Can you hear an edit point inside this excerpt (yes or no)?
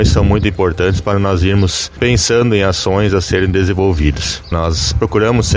yes